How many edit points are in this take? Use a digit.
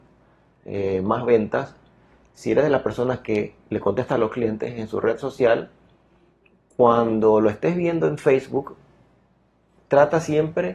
0